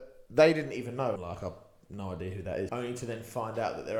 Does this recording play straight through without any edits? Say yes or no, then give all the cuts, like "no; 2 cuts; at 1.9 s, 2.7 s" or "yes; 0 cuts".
no; 2 cuts; at 1.2 s, 2.7 s